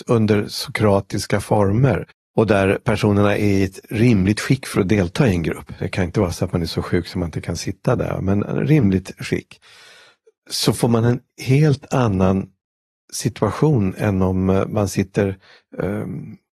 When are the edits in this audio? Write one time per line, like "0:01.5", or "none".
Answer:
none